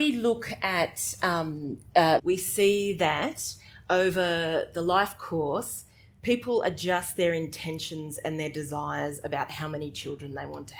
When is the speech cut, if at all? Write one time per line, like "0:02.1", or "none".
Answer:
0:02.2